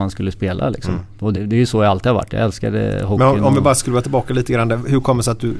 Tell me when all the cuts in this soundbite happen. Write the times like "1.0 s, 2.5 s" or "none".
1.3 s